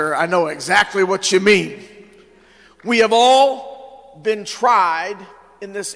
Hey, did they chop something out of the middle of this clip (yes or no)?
no